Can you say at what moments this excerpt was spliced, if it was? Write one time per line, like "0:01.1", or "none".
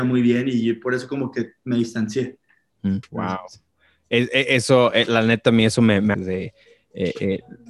0:03.0
0:06.1